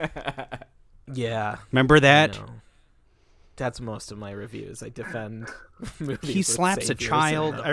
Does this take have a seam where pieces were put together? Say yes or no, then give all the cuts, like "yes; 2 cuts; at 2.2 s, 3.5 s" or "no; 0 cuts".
no; 0 cuts